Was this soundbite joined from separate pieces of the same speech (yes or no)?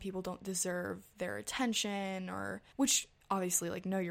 yes